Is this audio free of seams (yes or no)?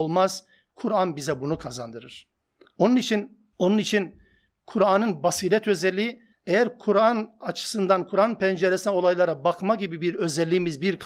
no